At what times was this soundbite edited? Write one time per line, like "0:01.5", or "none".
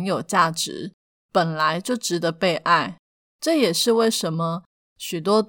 0:03.2